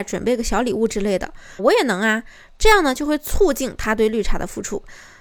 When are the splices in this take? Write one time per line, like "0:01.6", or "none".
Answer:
0:01.6